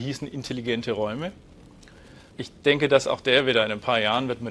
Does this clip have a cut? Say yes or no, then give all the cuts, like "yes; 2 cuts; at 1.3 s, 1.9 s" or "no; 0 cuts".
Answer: yes; 1 cut; at 2.3 s